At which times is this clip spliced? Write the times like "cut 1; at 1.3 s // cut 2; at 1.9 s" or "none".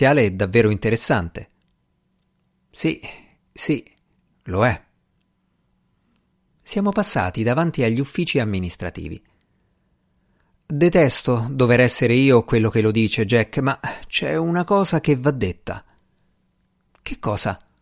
none